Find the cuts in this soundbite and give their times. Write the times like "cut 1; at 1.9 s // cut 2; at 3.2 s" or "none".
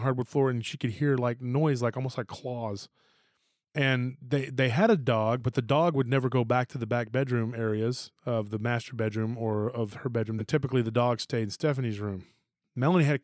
cut 1; at 10.4 s